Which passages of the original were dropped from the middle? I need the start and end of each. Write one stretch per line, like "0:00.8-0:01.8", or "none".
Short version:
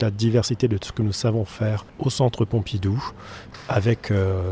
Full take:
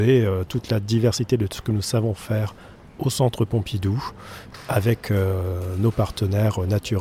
0:02.6-0:02.9